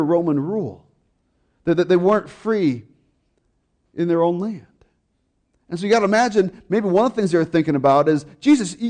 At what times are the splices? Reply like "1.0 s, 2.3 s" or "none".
none